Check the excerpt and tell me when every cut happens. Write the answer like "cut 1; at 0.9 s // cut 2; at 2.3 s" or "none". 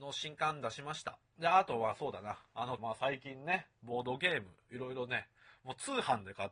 cut 1; at 1.2 s // cut 2; at 2.8 s